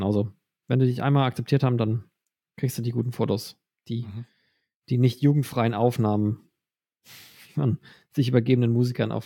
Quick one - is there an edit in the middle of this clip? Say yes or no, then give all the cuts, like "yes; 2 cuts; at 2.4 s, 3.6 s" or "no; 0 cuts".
no; 0 cuts